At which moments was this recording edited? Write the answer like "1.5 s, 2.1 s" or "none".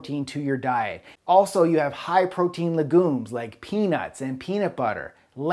1.2 s